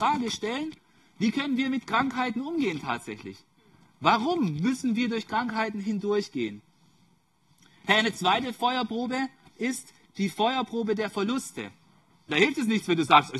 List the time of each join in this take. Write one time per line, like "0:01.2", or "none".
0:09.5
0:12.3